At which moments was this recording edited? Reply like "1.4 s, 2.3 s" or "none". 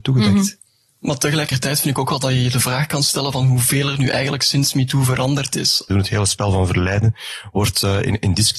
5.9 s